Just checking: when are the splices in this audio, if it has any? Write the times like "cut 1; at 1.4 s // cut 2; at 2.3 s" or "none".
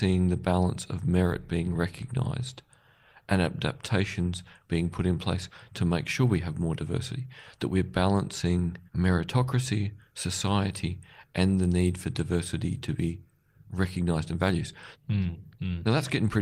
cut 1; at 8.9 s // cut 2; at 14.9 s